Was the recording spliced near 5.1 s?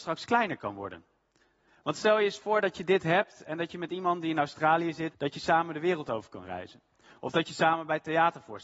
yes; 1 cut; at 5.1 s

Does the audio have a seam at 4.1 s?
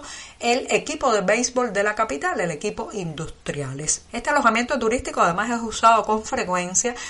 yes; 1 cut; at 4.1 s

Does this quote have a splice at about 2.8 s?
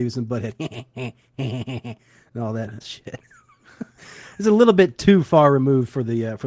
yes; 1 cut; at 2.8 s

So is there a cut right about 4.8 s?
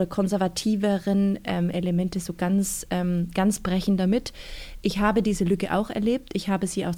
no; 0 cuts

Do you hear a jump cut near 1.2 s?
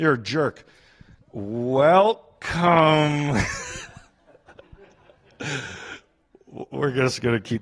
yes; 1 cut; at 1.2 s

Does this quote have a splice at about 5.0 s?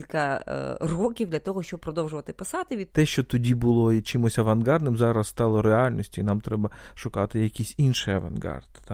no; 1 cut; at 2.9 s

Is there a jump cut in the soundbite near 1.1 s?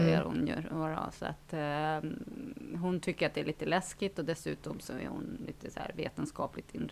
no; 0 cuts

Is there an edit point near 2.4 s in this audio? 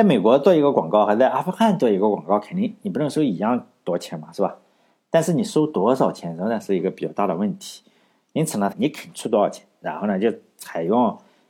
no; 1 cut; at 8.7 s

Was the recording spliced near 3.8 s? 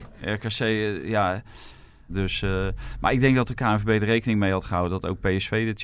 no; 1 cut; at 2.1 s

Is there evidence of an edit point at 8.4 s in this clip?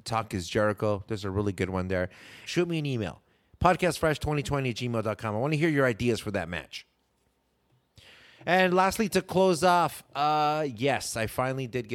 no; 1 cut; at 2.5 s

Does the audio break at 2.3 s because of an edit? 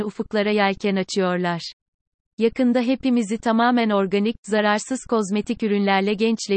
no; 0 cuts

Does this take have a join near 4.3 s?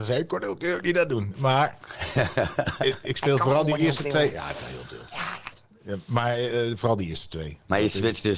no; 0 cuts

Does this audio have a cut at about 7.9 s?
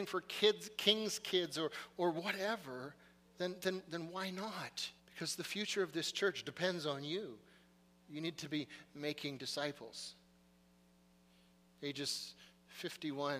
no; 1 cut; at 5.0 s

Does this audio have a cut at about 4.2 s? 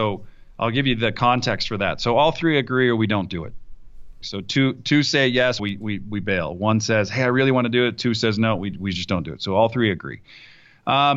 yes; 2 cuts; at 4.2 s, 5.6 s

